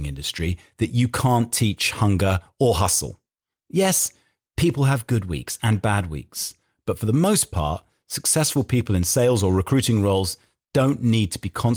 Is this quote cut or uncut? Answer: uncut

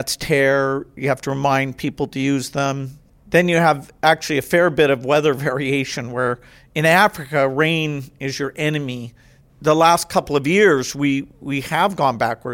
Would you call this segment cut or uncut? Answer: uncut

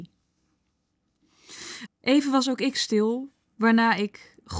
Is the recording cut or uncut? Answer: cut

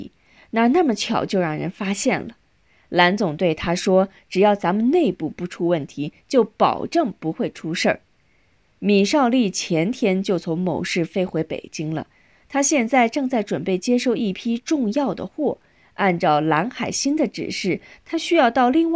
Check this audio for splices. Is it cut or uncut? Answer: cut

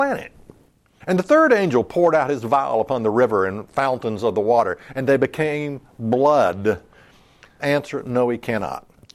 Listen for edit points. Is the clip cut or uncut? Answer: cut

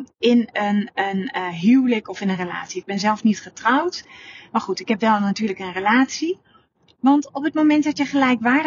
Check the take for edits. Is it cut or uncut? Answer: uncut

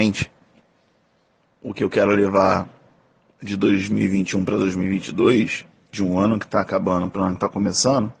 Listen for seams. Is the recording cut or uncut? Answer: uncut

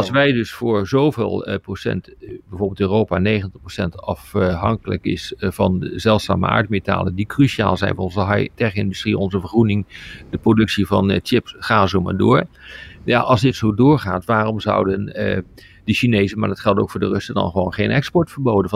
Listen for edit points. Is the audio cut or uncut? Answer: uncut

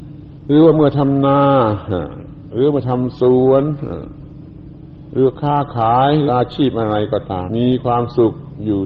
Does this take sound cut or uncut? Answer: cut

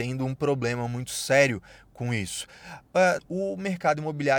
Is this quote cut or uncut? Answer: cut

